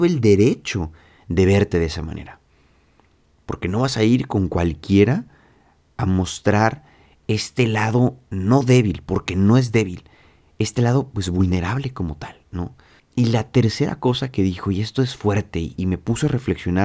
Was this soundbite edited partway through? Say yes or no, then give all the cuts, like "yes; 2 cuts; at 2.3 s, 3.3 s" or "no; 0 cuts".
yes; 2 cuts; at 13.0 s, 15.8 s